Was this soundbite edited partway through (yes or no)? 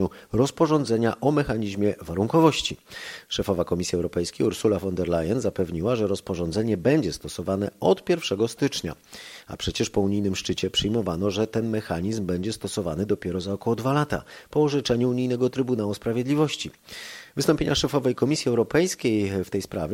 no